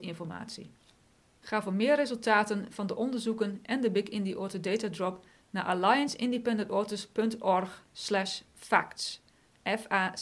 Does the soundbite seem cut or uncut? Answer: uncut